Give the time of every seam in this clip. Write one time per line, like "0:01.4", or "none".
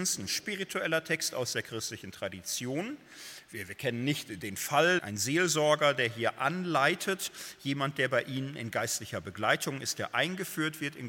0:05.0